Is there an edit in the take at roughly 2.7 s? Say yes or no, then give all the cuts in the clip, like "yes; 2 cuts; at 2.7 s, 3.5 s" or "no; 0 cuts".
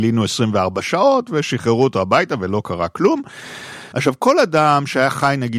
no; 1 cut; at 3.9 s